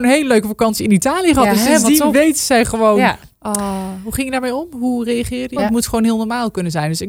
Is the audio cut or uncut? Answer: cut